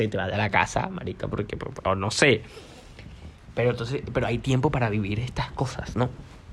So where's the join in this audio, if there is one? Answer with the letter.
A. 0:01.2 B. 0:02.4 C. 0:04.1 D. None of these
D